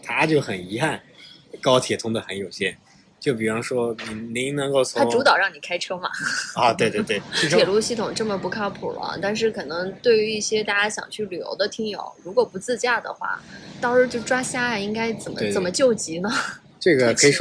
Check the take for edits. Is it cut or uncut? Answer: uncut